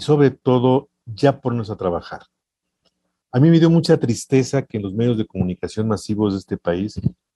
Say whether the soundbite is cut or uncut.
uncut